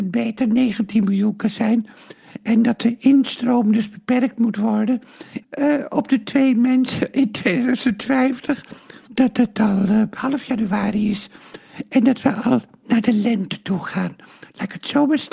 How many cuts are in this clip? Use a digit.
2